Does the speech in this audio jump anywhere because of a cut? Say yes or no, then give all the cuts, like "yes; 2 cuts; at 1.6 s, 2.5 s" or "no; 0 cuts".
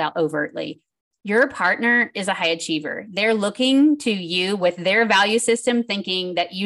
no; 0 cuts